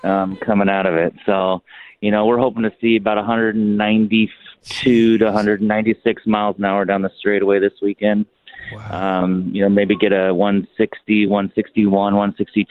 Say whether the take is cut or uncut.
uncut